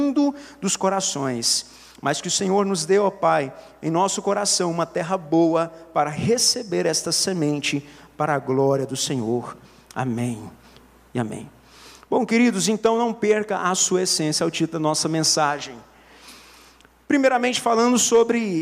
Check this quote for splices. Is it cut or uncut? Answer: uncut